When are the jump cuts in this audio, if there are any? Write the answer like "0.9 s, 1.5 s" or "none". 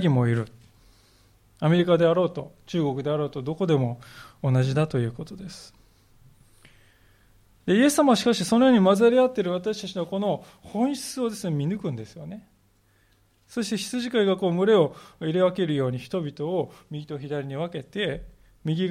none